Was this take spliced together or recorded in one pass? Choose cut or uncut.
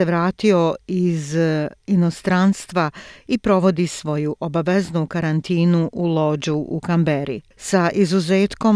uncut